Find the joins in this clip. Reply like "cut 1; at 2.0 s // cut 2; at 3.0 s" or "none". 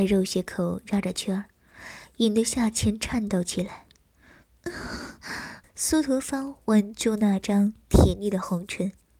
cut 1; at 5.6 s